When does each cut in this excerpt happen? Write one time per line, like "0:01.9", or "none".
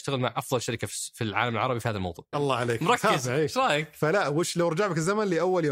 0:02.3